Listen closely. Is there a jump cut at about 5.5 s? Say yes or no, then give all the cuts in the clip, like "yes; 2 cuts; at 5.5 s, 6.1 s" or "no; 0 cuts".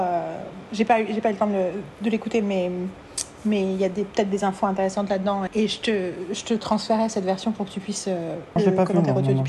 yes; 2 cuts; at 5.5 s, 8.6 s